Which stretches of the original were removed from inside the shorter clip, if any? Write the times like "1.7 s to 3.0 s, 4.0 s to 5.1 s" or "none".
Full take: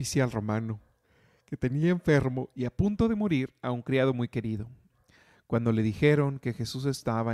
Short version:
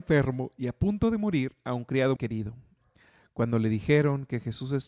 4.1 s to 4.3 s